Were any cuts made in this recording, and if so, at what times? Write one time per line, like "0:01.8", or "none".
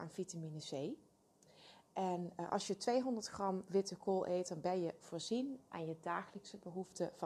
none